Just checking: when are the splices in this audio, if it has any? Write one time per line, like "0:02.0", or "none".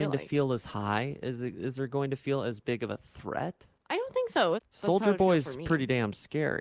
0:04.6